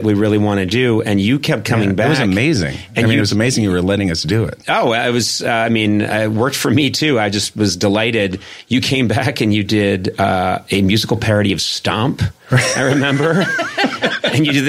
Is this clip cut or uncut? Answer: uncut